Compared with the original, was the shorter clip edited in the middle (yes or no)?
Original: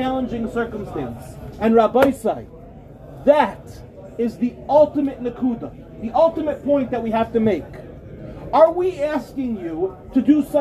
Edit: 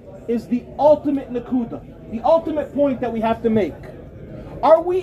no